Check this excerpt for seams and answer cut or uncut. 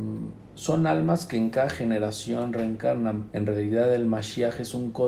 cut